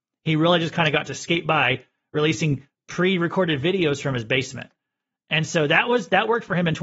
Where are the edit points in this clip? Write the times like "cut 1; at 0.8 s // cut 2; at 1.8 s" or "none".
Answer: none